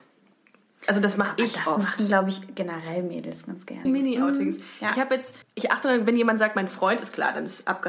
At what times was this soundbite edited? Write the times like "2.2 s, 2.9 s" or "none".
3.9 s, 5.4 s